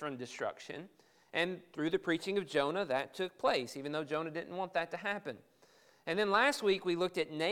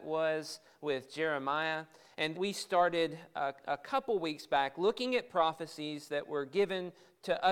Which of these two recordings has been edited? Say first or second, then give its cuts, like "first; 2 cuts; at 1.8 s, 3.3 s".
second; 1 cut; at 2.3 s